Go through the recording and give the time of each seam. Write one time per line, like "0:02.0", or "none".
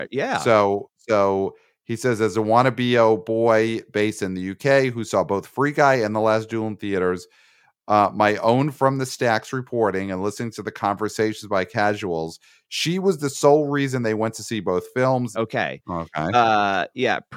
0:15.3